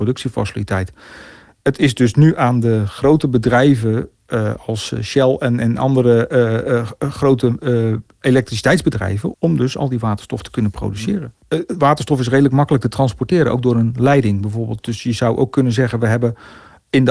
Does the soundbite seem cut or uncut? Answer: cut